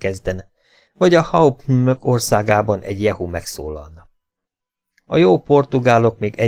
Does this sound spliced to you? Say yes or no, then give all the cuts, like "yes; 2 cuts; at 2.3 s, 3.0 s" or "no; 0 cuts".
no; 0 cuts